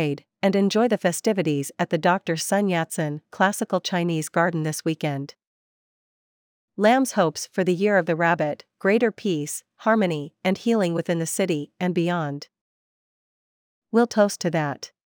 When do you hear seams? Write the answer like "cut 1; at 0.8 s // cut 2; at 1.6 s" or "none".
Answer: none